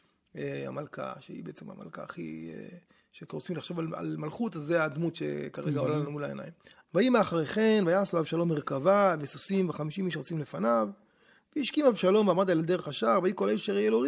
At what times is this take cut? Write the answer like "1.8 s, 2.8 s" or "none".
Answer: 6.8 s